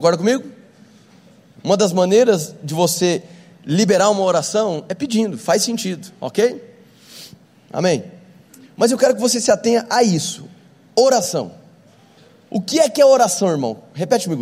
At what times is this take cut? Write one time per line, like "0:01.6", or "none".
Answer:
none